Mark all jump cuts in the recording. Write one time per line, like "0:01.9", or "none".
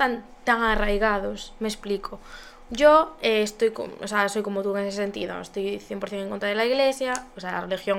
none